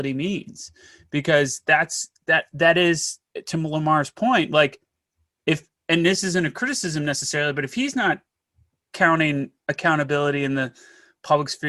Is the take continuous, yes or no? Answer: yes